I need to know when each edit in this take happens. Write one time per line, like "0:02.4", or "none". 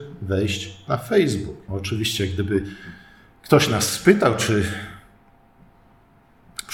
0:01.7